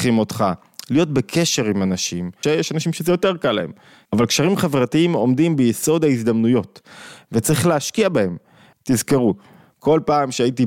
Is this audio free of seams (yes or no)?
no